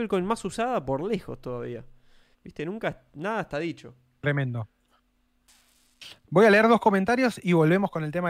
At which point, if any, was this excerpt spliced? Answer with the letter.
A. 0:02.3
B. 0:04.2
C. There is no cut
A